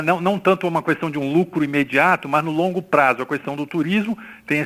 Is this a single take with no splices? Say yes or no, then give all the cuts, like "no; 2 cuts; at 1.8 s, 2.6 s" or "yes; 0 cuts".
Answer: yes; 0 cuts